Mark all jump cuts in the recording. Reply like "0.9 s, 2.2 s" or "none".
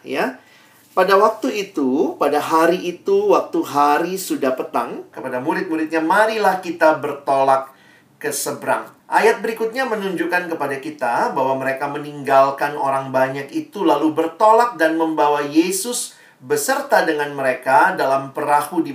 5.1 s, 9.0 s